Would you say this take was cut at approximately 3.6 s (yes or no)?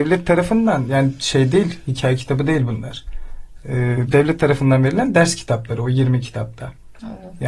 no